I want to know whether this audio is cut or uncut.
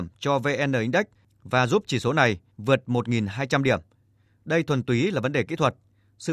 uncut